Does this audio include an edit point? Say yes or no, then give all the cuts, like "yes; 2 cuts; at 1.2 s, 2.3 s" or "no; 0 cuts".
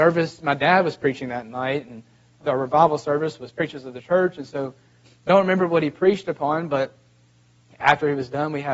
yes; 2 cuts; at 2.4 s, 5.1 s